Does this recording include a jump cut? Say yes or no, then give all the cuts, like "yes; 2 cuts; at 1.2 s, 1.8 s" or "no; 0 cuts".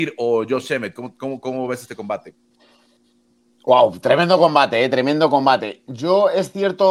no; 0 cuts